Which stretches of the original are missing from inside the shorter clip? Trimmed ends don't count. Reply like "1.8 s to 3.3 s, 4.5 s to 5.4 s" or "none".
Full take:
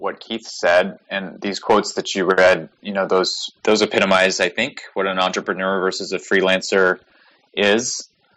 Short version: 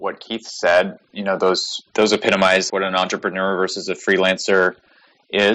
1.0 s to 2.7 s, 4.4 s to 4.9 s